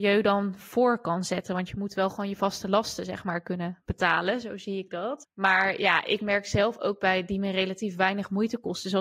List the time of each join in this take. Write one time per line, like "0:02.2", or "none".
none

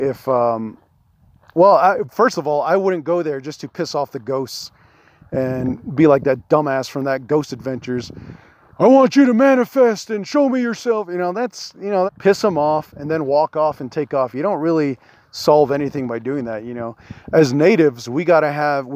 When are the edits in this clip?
0:12.1

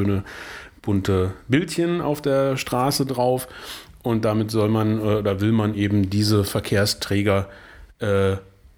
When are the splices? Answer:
none

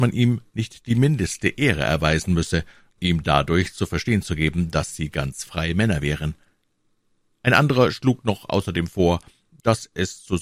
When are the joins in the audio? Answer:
0:03.0

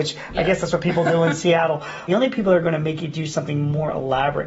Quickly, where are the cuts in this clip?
0:02.1

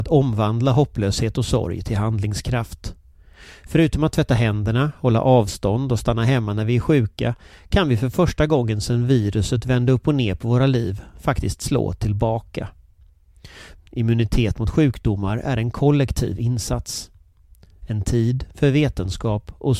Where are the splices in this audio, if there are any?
0:13.8

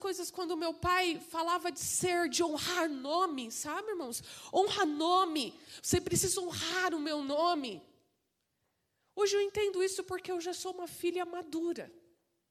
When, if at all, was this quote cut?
none

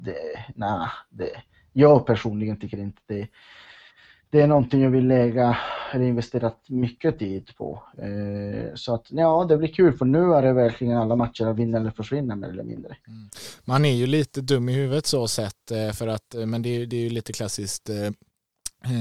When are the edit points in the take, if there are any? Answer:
none

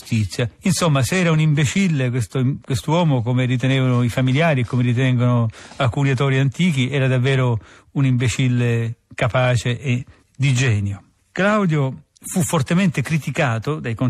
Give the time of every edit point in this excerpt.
none

